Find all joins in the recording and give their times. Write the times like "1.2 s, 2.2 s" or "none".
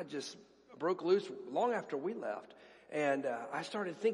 none